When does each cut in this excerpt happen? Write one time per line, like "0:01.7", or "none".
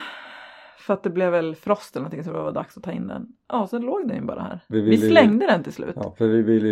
0:04.7